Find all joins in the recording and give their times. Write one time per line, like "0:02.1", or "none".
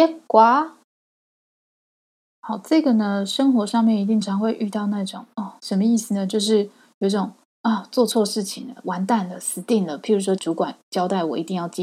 0:04.2
0:05.6
0:10.4